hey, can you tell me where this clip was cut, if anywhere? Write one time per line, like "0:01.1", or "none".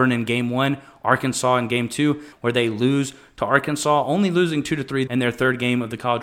0:02.3
0:05.1